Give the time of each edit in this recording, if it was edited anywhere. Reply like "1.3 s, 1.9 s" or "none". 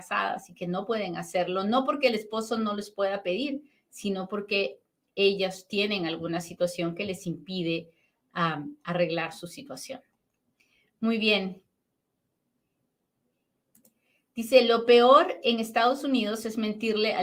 none